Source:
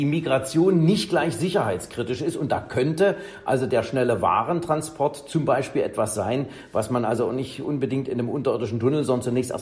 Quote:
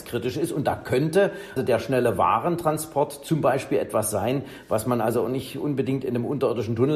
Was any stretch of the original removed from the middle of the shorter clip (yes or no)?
yes